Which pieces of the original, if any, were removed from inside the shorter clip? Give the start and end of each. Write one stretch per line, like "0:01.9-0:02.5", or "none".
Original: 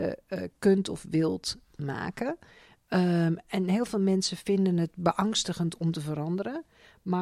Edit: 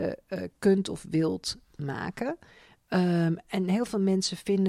none